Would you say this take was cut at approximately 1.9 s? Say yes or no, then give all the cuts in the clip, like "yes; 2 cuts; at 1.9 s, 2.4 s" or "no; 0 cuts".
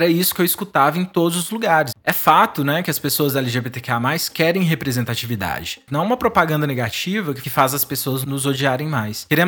yes; 2 cuts; at 1.9 s, 5.9 s